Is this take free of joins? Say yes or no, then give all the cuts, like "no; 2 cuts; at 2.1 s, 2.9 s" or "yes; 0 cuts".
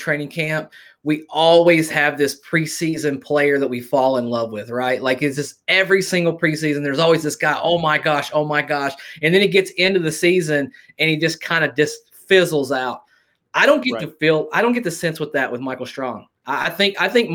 yes; 0 cuts